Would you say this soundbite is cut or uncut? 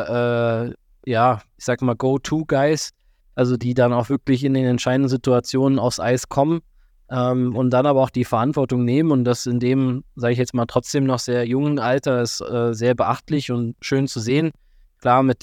uncut